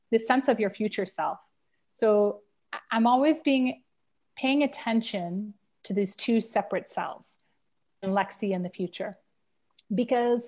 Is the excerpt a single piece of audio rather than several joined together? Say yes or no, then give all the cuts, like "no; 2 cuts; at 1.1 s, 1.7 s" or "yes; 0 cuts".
no; 1 cut; at 8.0 s